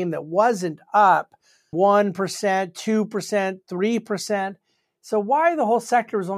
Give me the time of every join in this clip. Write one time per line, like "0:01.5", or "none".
0:01.7